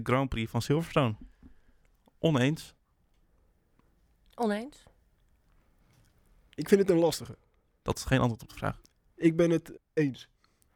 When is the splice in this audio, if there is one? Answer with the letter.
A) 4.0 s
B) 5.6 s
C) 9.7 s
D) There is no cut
C